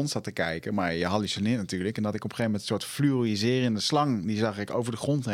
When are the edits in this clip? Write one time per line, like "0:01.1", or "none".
none